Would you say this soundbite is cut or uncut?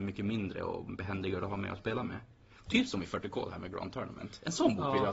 uncut